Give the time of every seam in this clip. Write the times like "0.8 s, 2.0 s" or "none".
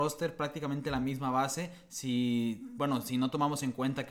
none